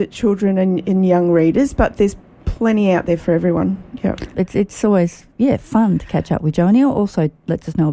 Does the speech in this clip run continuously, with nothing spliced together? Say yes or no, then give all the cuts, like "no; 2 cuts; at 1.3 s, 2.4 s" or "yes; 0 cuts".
no; 1 cut; at 4.3 s